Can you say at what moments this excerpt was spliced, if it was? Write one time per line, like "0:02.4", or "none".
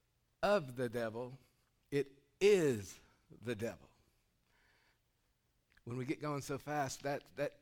none